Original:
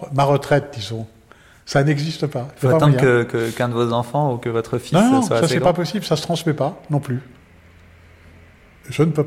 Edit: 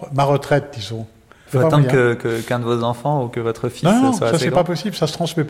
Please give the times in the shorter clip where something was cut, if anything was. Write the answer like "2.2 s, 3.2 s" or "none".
1.5 s